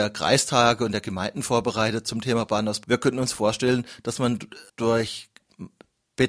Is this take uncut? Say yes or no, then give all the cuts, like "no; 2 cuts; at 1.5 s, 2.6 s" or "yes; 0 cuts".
no; 2 cuts; at 2.8 s, 4.7 s